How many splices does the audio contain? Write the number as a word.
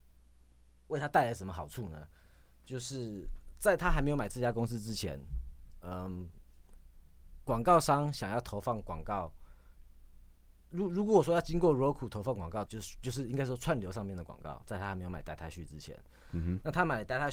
two